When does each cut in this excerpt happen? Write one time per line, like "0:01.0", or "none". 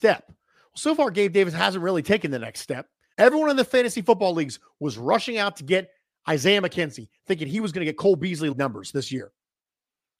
0:03.1
0:08.5